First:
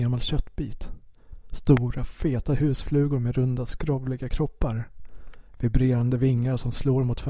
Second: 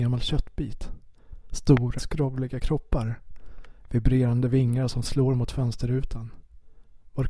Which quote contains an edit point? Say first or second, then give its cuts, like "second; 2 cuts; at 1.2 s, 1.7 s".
second; 1 cut; at 2.0 s